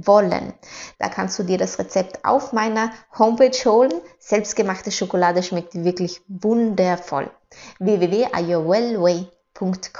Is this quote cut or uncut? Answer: cut